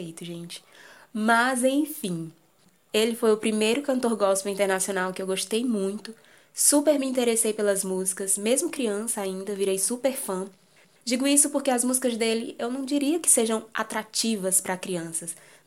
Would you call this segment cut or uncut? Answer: uncut